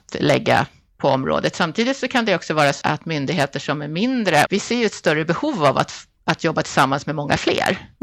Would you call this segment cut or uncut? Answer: cut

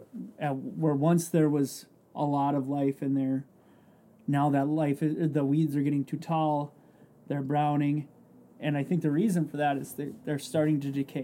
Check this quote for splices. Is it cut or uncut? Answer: uncut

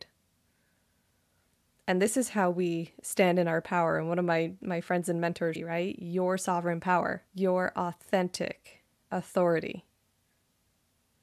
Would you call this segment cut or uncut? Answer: cut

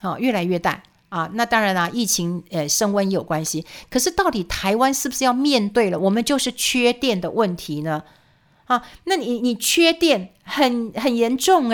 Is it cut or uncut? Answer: uncut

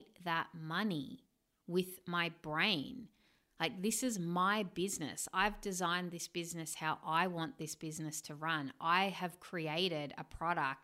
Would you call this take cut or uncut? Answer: uncut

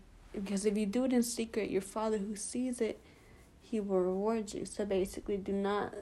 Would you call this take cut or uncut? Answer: uncut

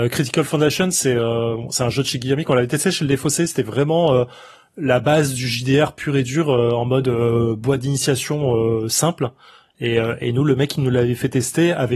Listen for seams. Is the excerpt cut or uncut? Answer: uncut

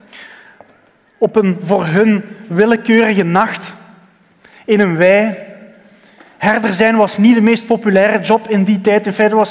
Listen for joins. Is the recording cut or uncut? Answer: uncut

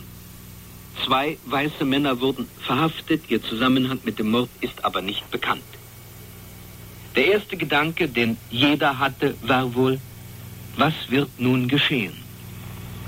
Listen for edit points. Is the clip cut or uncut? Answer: uncut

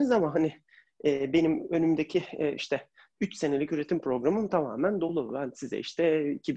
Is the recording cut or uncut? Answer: uncut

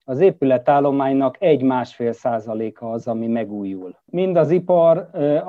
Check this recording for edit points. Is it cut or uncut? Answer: cut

